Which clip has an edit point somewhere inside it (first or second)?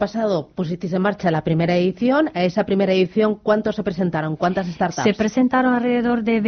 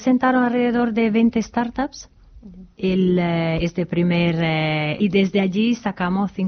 second